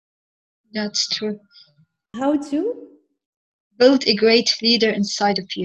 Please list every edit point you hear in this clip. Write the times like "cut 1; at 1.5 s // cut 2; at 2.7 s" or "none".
cut 1; at 2.1 s